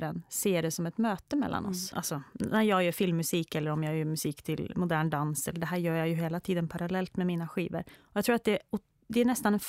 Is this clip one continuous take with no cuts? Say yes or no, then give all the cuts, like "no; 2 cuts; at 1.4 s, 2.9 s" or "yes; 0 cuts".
no; 2 cuts; at 1.9 s, 8.0 s